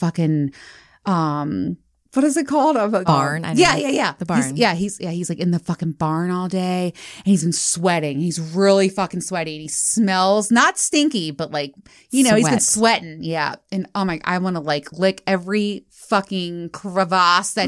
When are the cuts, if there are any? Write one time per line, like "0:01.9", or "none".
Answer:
0:03.1